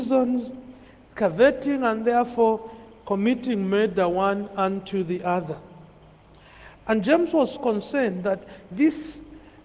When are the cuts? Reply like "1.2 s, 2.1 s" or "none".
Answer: 7.6 s